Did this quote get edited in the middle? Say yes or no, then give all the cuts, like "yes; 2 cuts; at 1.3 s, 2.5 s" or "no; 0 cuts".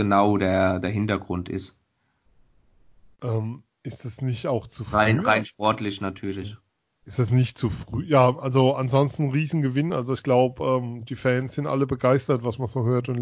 no; 0 cuts